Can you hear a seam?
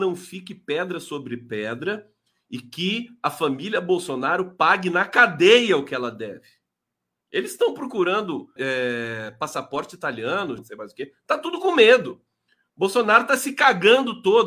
yes; 2 cuts; at 8.6 s, 10.6 s

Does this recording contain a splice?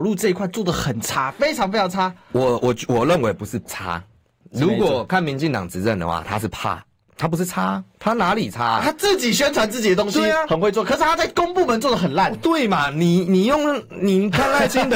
no; 0 cuts

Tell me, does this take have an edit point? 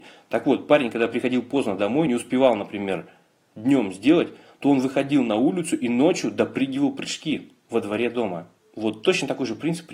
no; 0 cuts

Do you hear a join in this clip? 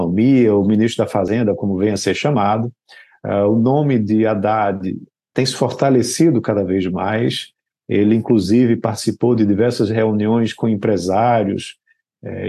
no; 0 cuts

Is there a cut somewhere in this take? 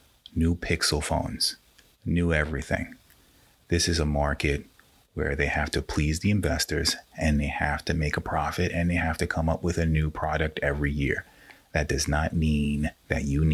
no; 0 cuts

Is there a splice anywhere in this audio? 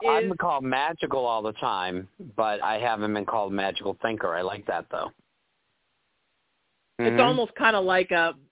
yes; 1 cut; at 7.0 s

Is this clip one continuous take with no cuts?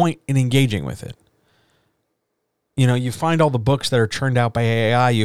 yes; 0 cuts

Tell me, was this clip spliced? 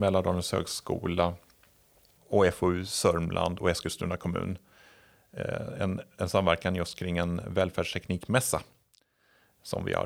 no; 0 cuts

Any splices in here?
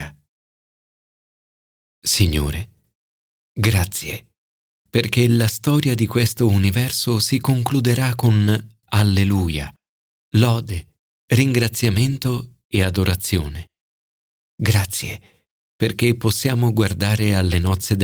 no; 0 cuts

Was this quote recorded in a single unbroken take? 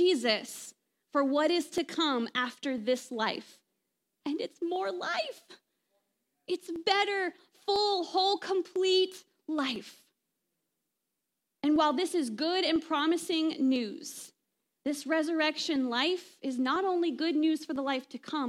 yes; 0 cuts

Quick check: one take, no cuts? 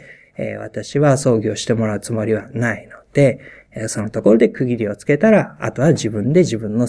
yes; 0 cuts

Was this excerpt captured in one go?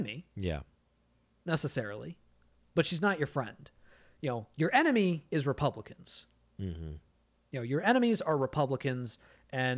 yes; 0 cuts

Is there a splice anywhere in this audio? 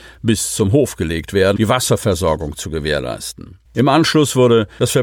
yes; 2 cuts; at 1.6 s, 3.7 s

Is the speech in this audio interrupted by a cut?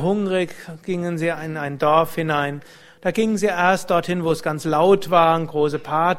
no; 0 cuts

